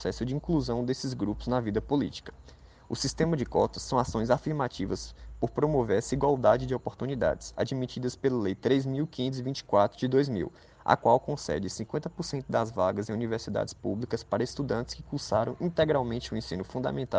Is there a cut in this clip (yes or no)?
no